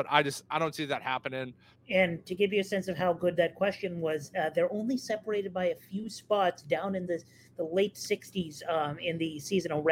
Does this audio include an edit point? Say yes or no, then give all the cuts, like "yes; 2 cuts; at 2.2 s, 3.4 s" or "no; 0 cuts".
yes; 1 cut; at 1.8 s